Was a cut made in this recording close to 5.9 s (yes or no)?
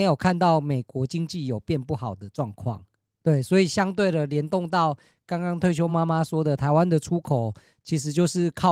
no